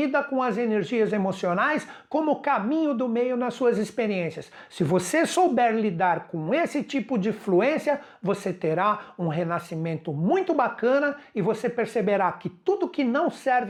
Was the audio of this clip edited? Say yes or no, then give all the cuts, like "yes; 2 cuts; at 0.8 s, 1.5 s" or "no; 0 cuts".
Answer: no; 0 cuts